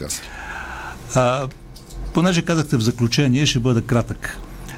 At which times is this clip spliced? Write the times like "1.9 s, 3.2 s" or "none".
none